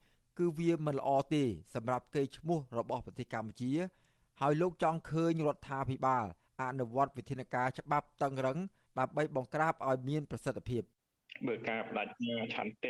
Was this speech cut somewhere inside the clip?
no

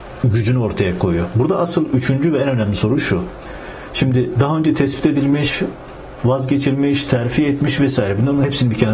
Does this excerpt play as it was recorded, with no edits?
yes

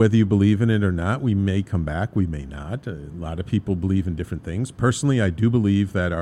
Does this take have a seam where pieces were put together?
no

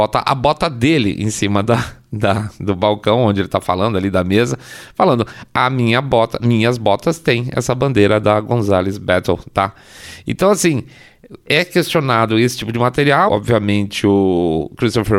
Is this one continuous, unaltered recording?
no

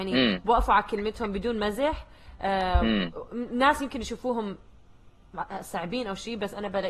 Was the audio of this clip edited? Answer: no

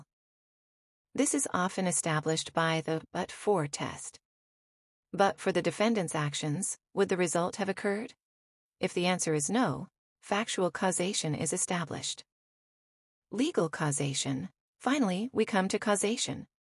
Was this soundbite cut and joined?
yes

